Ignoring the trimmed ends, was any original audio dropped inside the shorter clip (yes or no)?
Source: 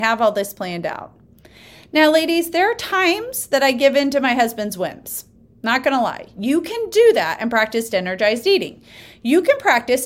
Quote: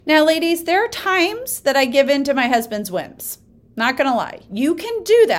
no